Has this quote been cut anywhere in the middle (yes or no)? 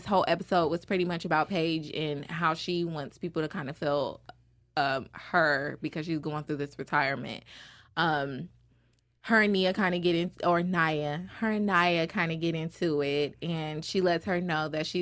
no